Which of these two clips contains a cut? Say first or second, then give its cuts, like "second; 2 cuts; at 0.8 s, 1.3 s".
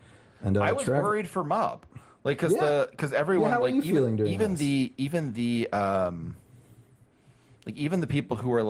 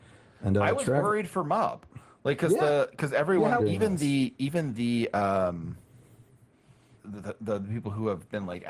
second; 2 cuts; at 3.6 s, 7.0 s